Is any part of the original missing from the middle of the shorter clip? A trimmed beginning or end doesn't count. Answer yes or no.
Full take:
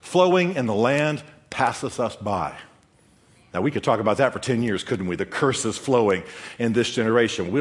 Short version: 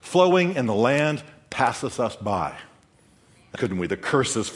yes